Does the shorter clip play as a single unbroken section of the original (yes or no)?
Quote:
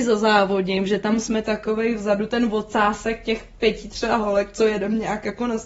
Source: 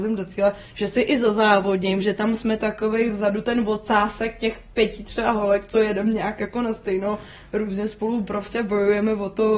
yes